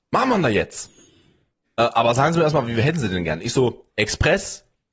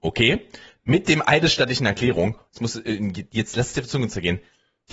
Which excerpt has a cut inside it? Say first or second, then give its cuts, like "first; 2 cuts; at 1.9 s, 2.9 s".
first; 1 cut; at 1.6 s